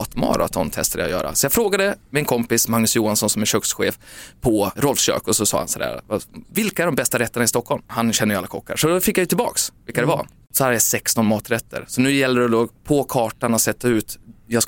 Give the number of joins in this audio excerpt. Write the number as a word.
one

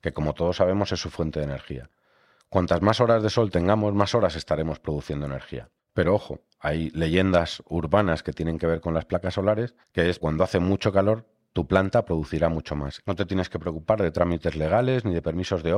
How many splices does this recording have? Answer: three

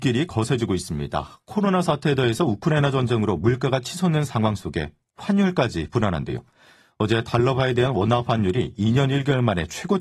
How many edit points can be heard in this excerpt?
zero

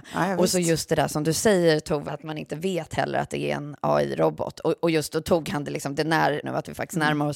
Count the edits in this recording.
two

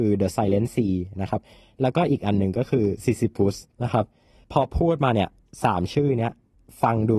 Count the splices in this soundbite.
one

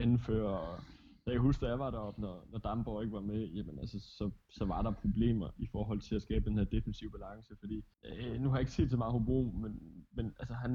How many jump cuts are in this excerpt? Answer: one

